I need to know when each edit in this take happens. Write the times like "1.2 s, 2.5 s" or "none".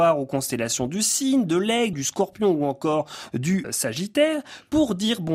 1.9 s, 3.6 s